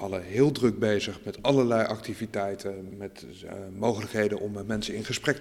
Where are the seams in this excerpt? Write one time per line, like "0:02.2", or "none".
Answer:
0:02.9